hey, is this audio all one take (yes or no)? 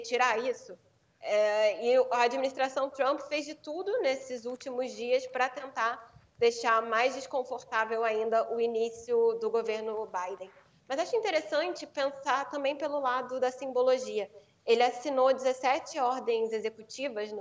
yes